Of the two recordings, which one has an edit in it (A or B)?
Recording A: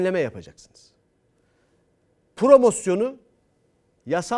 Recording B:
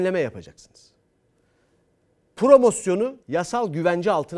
B